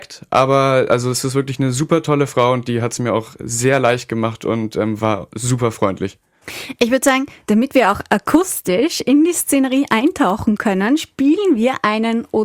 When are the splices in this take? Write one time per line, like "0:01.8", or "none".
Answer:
none